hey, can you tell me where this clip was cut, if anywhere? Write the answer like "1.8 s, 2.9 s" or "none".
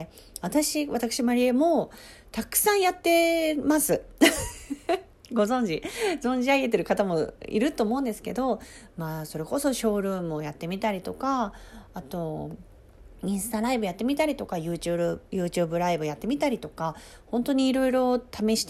none